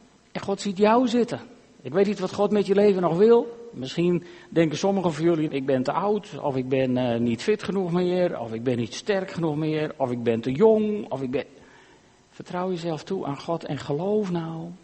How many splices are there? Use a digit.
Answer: 2